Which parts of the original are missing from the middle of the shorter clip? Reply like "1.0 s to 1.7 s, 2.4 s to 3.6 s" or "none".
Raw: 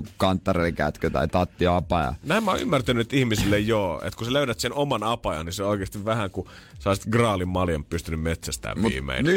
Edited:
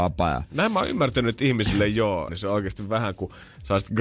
4.0 s to 5.4 s